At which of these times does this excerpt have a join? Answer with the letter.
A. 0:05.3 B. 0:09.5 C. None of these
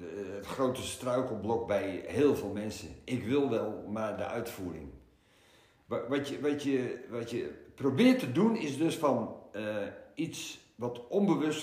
C